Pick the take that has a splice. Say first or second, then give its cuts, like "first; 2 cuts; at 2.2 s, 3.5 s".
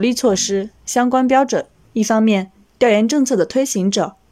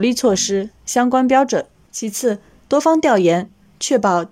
first; 1 cut; at 1.8 s